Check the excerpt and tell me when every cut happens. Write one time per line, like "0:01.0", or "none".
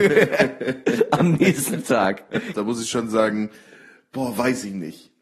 0:02.5

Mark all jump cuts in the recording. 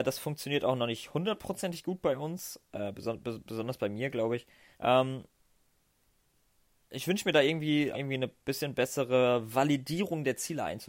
0:04.7
0:07.9

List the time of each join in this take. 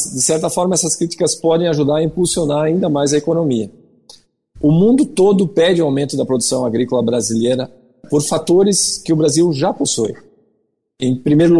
none

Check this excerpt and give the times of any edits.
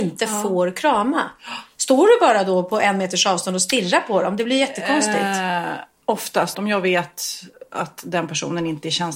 0:06.5

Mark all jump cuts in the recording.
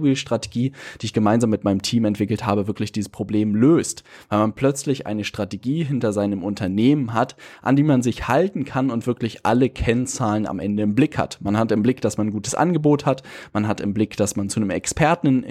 none

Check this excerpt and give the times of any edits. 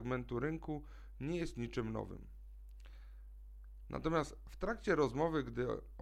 none

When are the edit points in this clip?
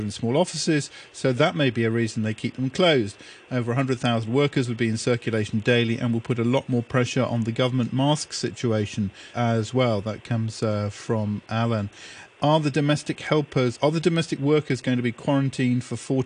0:09.3
0:12.4

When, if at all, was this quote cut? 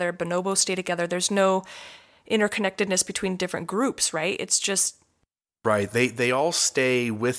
none

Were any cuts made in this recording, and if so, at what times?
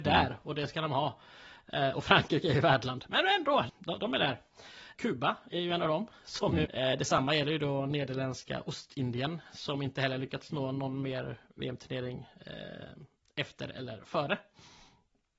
0:03.7
0:04.9
0:06.7

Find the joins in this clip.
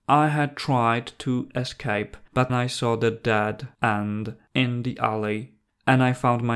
0:02.5

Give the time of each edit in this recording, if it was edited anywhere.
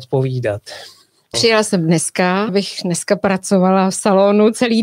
0:01.3
0:02.5

